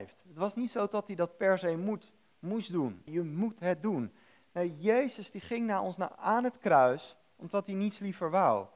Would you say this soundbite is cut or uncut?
cut